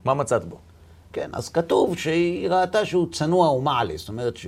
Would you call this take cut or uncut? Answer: uncut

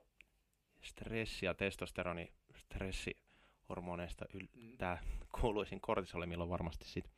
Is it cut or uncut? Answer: uncut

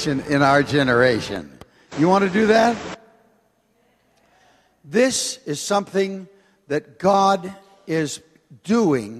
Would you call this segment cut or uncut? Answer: uncut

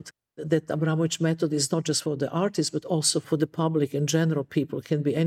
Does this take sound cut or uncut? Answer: uncut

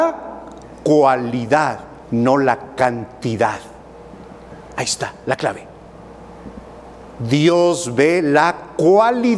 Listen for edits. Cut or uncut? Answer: cut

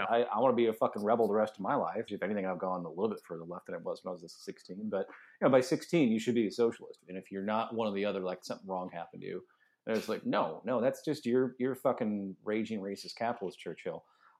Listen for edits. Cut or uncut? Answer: cut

